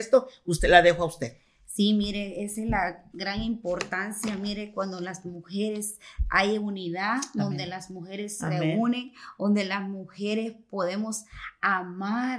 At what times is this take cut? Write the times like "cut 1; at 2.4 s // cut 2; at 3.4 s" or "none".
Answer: none